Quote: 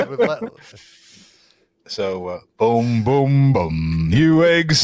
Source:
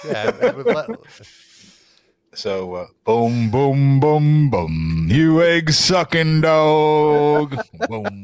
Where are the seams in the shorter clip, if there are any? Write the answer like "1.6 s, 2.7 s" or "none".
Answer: 3.5 s